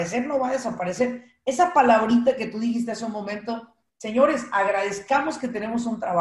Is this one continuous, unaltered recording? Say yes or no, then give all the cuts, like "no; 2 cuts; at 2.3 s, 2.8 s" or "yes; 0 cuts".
yes; 0 cuts